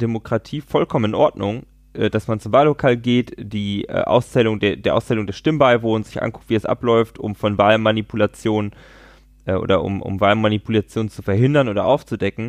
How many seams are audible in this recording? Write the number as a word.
zero